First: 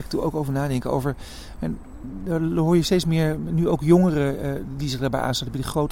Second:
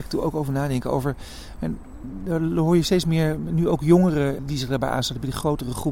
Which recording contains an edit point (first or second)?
second